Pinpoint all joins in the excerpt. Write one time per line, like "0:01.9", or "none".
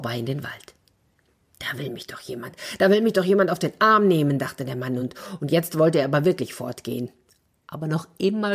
none